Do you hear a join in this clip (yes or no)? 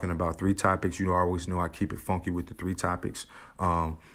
no